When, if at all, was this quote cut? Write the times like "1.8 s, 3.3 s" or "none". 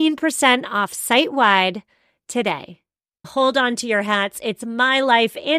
3.2 s